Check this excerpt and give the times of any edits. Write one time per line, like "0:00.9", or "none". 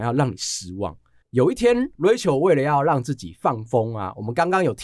0:01.2